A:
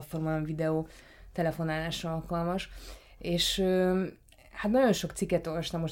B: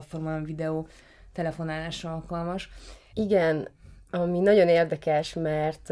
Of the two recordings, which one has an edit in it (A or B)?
B